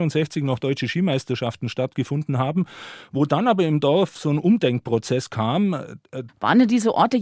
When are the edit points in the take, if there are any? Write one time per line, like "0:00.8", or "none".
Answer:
0:06.3